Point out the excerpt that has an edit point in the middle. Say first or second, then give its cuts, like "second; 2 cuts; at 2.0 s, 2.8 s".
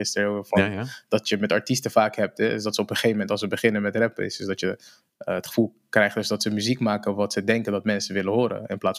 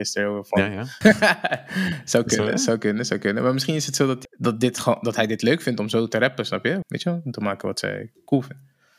second; 3 cuts; at 1.0 s, 4.2 s, 6.8 s